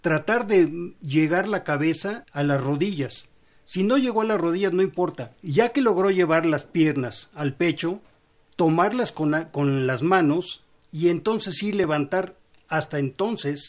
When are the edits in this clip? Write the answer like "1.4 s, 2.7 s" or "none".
2.2 s, 5.4 s